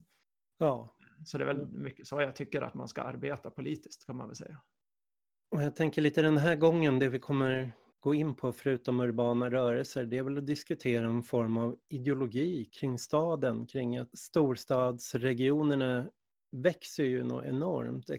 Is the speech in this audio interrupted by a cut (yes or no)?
no